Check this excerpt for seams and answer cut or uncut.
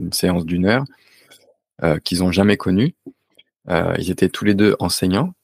uncut